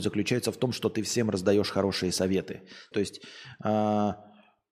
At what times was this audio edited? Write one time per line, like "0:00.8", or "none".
0:02.9